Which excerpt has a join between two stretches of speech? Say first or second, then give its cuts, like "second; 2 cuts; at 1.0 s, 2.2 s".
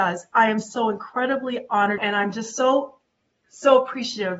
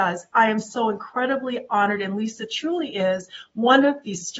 first; 1 cut; at 2.0 s